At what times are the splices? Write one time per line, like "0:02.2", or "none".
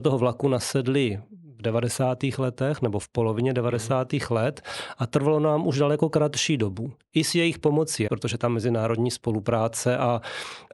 0:08.1